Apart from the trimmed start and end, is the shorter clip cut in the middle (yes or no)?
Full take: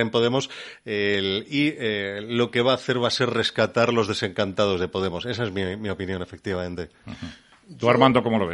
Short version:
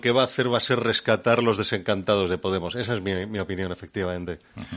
no